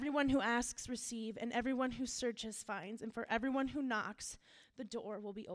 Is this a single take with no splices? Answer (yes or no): yes